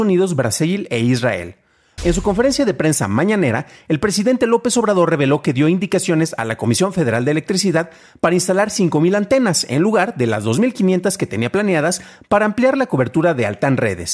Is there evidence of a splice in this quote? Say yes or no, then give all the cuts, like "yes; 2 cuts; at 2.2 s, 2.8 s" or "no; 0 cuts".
yes; 1 cut; at 2.0 s